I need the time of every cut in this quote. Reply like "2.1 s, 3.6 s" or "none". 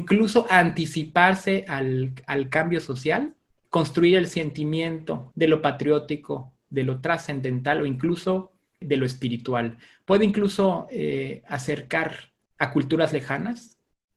3.6 s, 5.3 s

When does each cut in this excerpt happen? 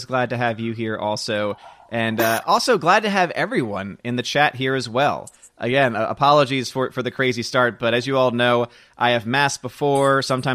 none

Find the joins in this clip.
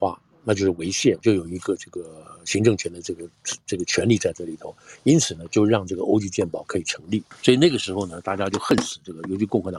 1.2 s

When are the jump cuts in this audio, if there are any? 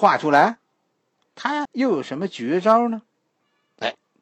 1.7 s

